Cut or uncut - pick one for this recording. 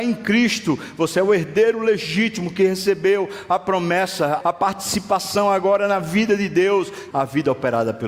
cut